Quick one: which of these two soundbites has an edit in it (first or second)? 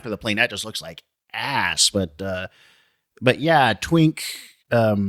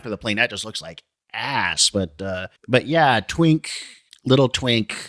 second